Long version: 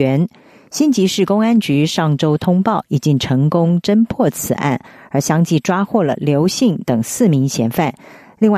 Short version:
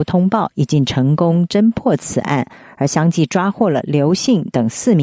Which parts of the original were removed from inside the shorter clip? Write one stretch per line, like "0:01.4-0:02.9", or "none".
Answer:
none

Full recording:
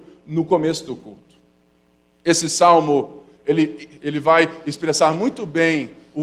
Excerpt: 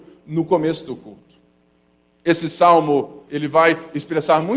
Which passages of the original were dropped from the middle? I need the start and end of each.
0:03.3-0:04.0

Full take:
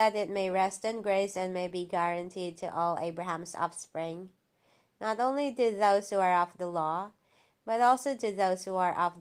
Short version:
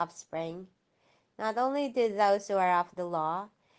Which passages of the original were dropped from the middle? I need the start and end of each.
none

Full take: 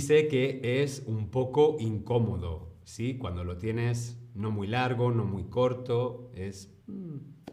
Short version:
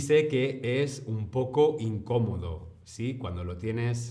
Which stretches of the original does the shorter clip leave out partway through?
none

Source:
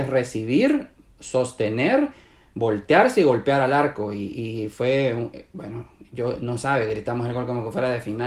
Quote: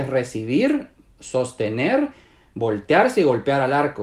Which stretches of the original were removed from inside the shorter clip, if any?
none

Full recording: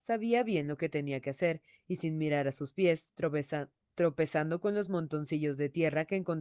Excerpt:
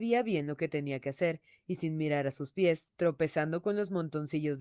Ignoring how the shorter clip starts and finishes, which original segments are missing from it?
0:03.1-0:03.9

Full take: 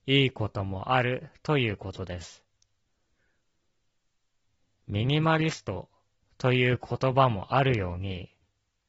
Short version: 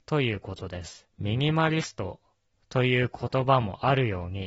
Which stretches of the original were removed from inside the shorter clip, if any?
0:02.5-0:04.8

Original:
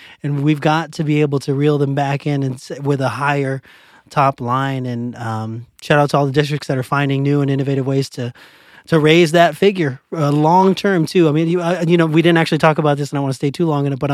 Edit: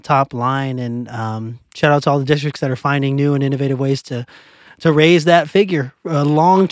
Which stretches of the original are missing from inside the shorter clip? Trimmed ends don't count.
none

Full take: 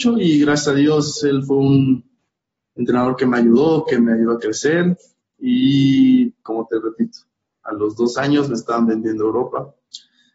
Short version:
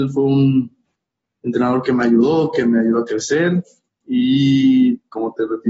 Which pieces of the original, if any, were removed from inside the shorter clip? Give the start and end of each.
none

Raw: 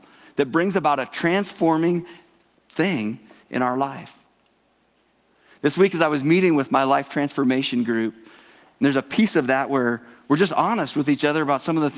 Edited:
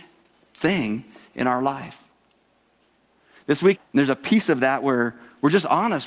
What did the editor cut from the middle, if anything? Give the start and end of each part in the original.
0:05.9-0:08.6

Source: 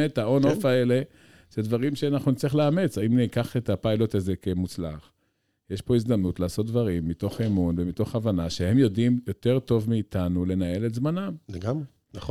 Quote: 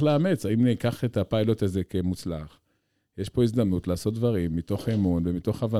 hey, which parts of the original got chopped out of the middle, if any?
none

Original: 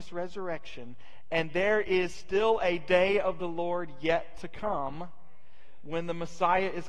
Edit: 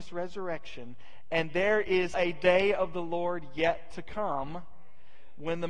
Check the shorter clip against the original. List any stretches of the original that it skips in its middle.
0:02.1-0:02.6

